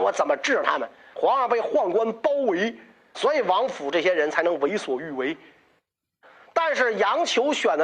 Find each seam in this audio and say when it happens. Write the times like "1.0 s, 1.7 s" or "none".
1.1 s, 3.1 s, 6.5 s